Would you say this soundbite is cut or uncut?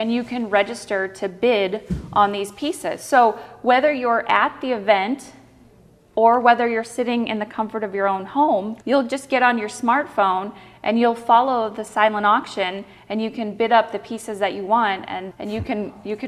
cut